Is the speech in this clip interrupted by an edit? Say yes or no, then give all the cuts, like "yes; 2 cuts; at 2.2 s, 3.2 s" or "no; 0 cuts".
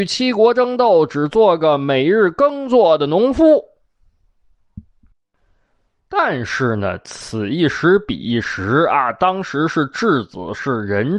no; 0 cuts